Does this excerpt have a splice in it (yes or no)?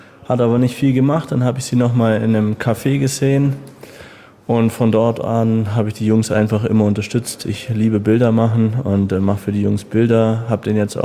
no